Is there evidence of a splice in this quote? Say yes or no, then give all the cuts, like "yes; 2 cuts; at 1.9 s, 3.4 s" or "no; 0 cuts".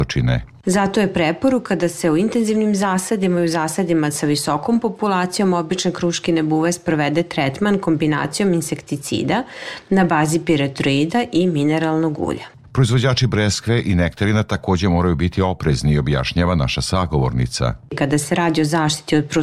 no; 0 cuts